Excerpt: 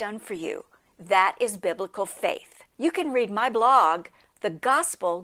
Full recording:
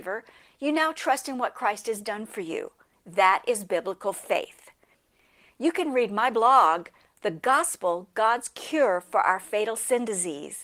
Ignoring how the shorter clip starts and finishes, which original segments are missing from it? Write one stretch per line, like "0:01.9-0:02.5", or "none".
0:04.8-0:05.5